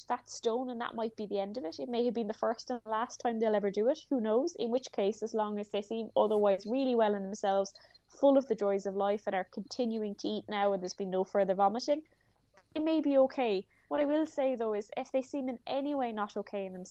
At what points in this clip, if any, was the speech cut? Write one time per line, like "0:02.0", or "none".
none

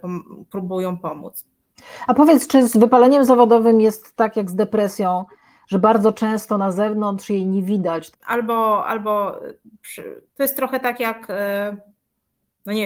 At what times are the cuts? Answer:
0:08.1
0:10.3

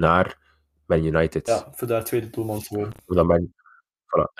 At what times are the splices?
none

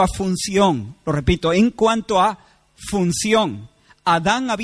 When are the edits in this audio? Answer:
none

